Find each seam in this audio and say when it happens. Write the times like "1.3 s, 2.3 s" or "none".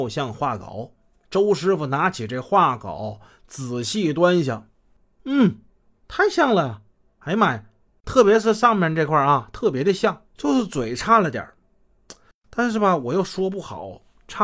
8.0 s, 10.3 s